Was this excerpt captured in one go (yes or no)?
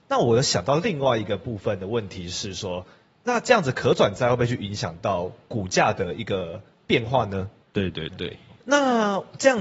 no